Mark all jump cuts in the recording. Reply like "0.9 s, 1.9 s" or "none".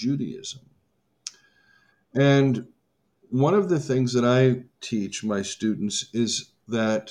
none